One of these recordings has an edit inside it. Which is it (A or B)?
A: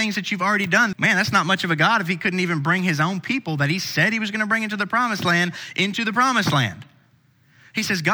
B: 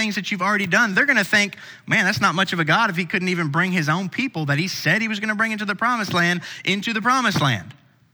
A